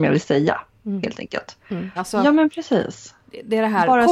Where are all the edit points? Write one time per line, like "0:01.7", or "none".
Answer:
0:02.0